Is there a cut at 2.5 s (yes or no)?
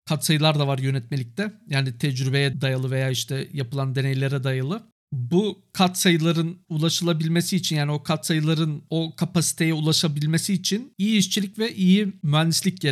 yes